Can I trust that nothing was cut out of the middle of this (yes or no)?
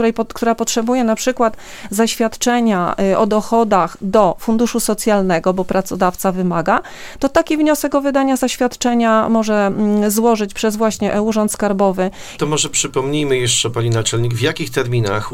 no